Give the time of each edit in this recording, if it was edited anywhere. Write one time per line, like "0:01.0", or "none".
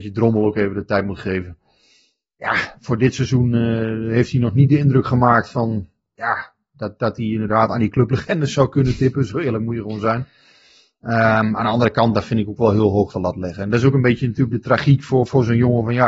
none